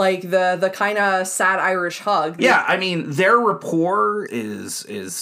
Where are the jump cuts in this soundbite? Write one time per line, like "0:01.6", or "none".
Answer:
0:02.4
0:04.3